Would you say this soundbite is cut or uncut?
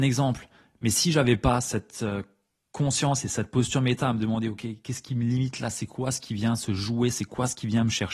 uncut